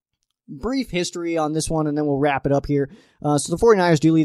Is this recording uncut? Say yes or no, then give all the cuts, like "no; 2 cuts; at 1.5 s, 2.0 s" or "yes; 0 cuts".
yes; 0 cuts